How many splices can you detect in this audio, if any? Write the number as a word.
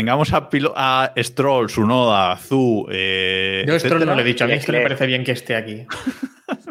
zero